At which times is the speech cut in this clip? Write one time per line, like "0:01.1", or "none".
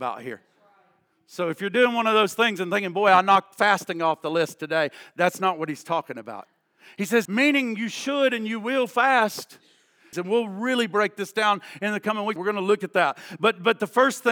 0:07.3
0:10.1
0:12.4

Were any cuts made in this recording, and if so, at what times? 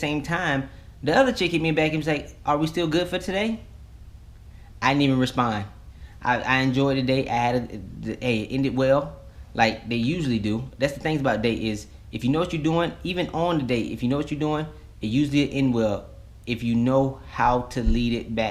none

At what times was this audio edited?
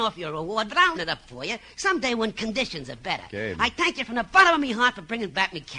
0:00.9

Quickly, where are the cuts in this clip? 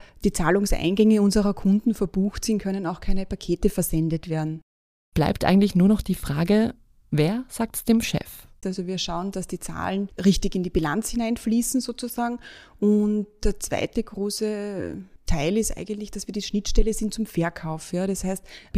0:08.6
0:10.2

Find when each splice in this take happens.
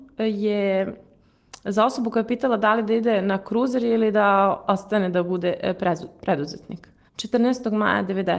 0:07.1

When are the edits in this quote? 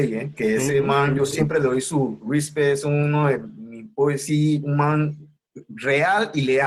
none

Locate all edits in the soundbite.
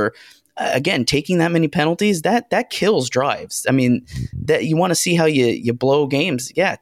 none

